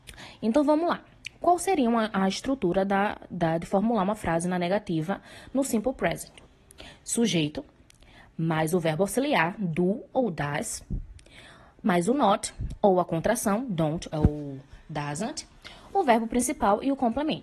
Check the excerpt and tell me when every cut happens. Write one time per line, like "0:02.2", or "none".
0:14.1